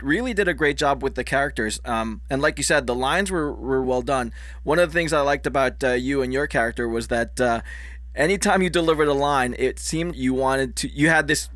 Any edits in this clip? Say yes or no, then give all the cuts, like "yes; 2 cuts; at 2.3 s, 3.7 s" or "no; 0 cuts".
yes; 2 cuts; at 3.8 s, 10.1 s